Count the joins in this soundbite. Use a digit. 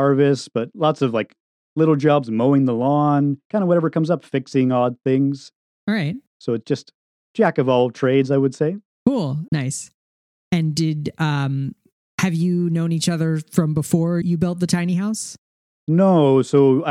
2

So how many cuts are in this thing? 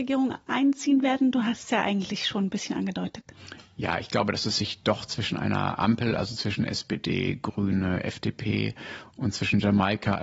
0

